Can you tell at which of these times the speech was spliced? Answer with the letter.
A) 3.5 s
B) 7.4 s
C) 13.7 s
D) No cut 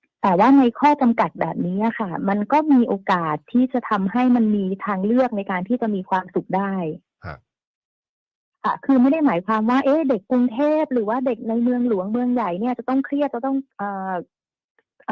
C